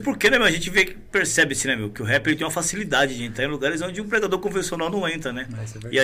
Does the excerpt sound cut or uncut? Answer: uncut